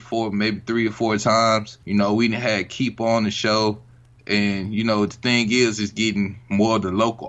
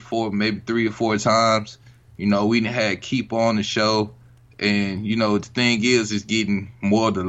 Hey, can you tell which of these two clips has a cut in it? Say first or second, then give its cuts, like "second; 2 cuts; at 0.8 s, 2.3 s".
first; 1 cut; at 1.8 s